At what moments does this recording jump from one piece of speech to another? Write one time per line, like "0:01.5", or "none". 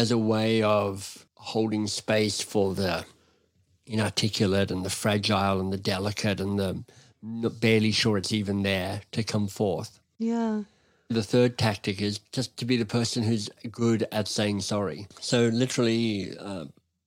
0:01.3
0:15.1